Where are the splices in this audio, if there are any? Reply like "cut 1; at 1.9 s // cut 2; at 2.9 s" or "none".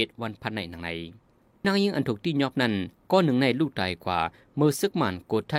cut 1; at 1.6 s